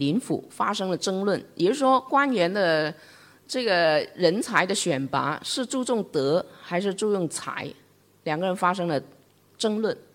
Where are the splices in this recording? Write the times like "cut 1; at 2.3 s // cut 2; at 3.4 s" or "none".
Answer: none